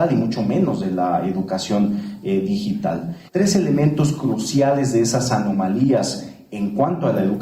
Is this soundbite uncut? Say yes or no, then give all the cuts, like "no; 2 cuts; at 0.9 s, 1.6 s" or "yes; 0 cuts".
no; 1 cut; at 3.3 s